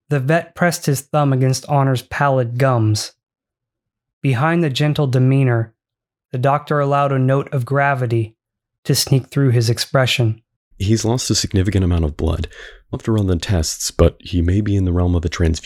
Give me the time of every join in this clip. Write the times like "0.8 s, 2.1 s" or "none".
12.9 s